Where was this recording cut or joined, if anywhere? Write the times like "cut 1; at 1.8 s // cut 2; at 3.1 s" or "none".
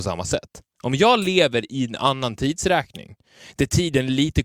none